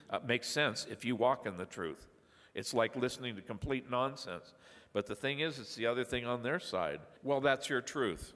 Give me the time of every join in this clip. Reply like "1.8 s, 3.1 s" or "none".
7.2 s